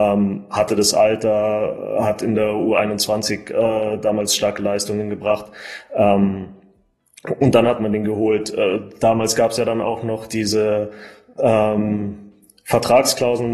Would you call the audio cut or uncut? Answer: uncut